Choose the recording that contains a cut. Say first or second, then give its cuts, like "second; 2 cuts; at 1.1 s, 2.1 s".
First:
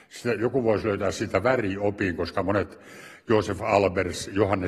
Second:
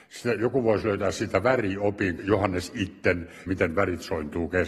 second; 2 cuts; at 2.2 s, 3.5 s